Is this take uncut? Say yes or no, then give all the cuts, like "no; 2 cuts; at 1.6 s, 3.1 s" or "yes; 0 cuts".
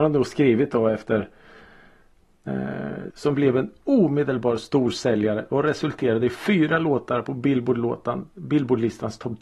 no; 1 cut; at 3.1 s